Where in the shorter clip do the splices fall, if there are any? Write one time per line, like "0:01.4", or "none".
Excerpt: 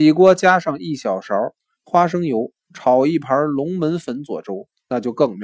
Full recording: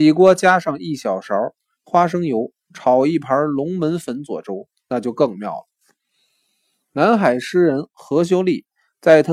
none